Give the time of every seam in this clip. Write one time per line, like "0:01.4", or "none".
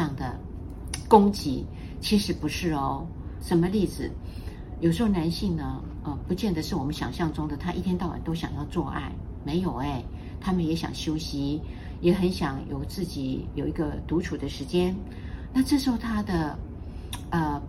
0:03.4